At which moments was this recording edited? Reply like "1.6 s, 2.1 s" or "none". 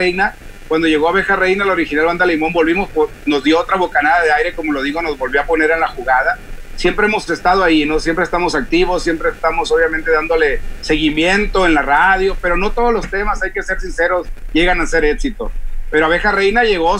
none